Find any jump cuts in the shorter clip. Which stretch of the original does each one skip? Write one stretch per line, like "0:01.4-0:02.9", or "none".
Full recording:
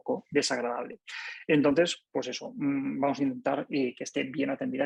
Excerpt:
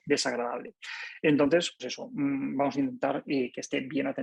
0:02.0-0:02.2